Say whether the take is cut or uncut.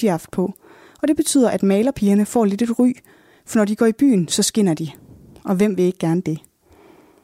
uncut